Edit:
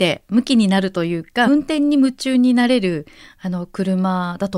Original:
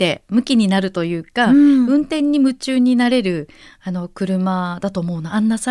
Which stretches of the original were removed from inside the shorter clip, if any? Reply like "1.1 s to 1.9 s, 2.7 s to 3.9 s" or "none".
1.5 s to 1.9 s

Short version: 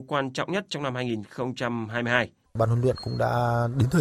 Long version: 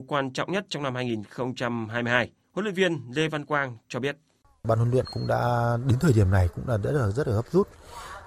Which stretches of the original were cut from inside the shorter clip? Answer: 2.5 s to 4.5 s

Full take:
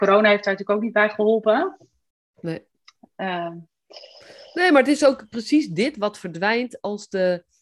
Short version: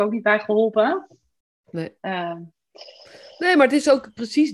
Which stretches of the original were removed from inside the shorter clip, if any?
2.7 s to 3.1 s

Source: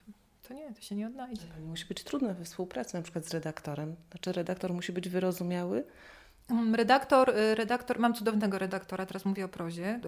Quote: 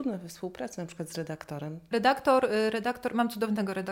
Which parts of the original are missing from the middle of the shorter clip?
4.1 s to 6.8 s

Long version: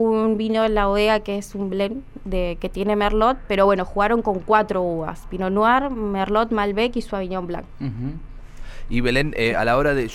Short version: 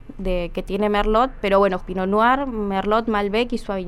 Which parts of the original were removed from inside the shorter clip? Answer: 3.9 s to 5.2 s

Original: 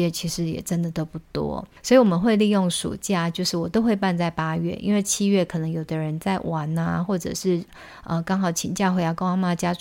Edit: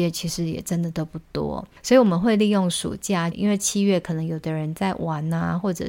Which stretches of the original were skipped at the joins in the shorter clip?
3.3 s to 4.8 s

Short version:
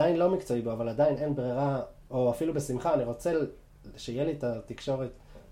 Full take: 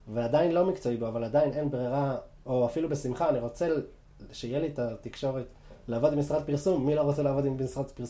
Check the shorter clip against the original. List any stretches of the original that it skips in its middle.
none

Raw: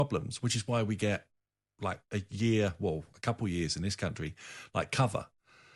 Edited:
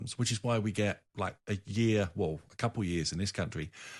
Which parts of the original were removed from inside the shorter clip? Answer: 1.3 s to 1.7 s

